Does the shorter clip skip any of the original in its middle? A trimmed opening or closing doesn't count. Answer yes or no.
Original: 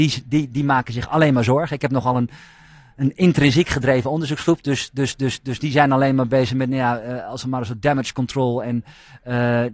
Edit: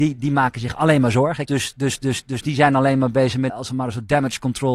yes